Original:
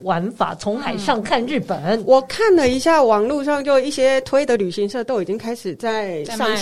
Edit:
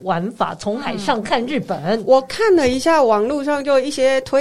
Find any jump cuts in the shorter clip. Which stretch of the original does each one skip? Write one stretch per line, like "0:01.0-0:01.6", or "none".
none